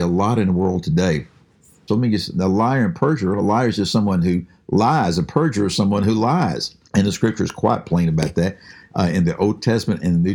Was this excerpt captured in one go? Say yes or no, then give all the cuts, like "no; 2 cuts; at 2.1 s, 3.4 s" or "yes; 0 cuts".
no; 2 cuts; at 1.9 s, 6.8 s